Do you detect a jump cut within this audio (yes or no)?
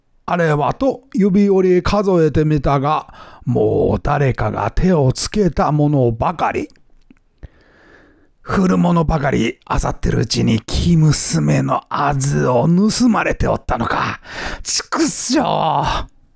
no